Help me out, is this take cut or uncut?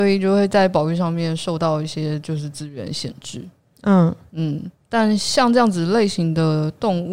uncut